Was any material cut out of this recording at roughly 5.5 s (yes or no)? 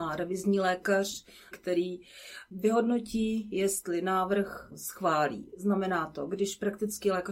no